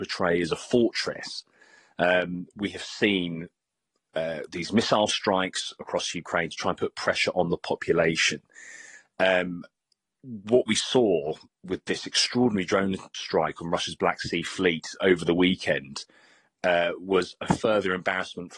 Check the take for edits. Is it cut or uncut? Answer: uncut